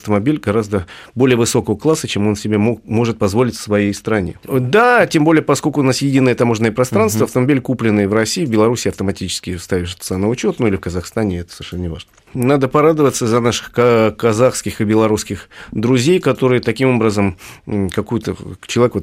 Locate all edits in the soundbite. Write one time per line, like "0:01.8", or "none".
0:04.4
0:12.3